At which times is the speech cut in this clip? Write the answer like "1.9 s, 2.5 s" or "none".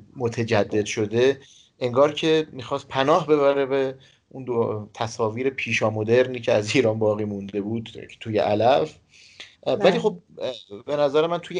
9.5 s